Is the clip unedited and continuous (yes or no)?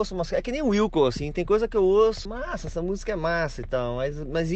no